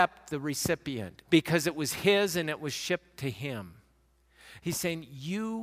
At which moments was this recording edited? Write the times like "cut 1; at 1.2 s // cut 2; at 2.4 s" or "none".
cut 1; at 1.2 s // cut 2; at 4.6 s